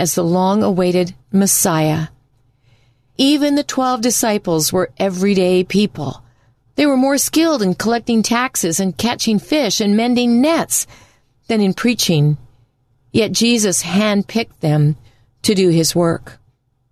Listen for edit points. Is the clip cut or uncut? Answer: uncut